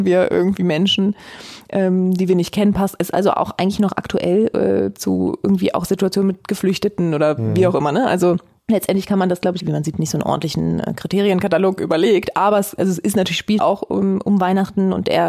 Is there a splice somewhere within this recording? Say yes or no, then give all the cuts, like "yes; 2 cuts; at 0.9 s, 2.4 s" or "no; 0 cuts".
yes; 2 cuts; at 9.6 s, 13.6 s